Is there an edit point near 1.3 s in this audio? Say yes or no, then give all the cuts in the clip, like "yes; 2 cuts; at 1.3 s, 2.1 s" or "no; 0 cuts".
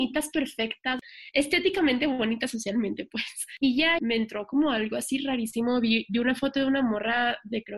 no; 1 cut; at 4.0 s